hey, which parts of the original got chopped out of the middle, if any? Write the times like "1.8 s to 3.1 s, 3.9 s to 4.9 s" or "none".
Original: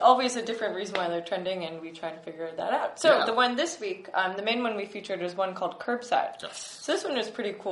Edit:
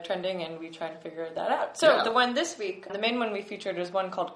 4.1 s to 4.3 s